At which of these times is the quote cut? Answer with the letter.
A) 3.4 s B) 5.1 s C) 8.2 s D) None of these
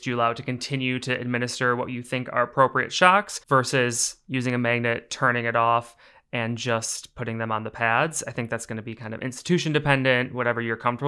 A